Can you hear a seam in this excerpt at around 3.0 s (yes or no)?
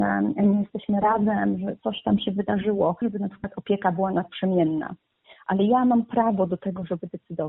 yes